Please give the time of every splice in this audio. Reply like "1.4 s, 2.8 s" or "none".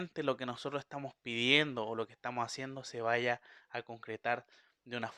none